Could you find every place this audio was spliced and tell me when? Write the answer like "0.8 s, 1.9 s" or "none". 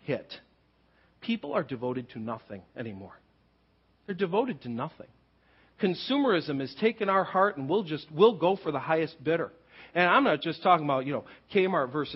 none